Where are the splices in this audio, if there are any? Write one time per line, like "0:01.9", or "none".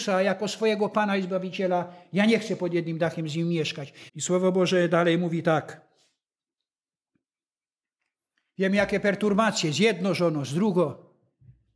0:04.1